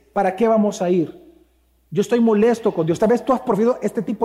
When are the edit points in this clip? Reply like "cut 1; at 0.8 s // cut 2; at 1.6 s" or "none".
none